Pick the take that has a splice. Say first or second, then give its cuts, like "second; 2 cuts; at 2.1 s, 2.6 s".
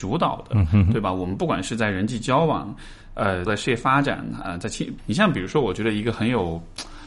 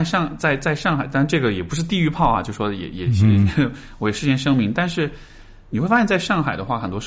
first; 2 cuts; at 3.5 s, 5.0 s